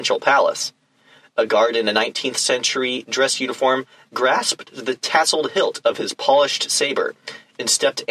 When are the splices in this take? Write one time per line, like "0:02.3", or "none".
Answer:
none